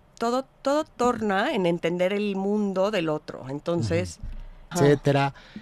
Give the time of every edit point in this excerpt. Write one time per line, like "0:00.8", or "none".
0:04.7

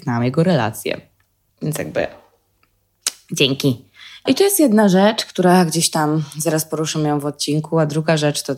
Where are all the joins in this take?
0:01.5
0:04.3

